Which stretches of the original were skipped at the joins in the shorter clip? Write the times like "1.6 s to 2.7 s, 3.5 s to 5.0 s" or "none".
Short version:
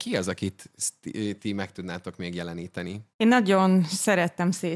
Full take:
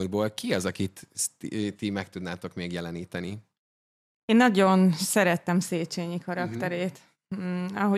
3.5 s to 4.2 s